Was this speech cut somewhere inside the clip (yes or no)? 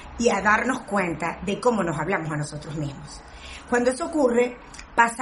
no